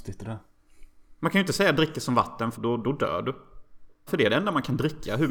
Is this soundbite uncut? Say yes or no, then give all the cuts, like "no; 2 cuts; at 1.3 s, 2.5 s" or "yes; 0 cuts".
no; 2 cuts; at 2.5 s, 4.1 s